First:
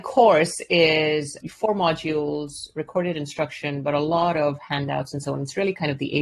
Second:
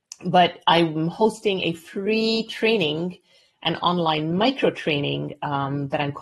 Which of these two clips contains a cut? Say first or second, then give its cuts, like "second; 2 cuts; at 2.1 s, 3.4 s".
first; 1 cut; at 1.4 s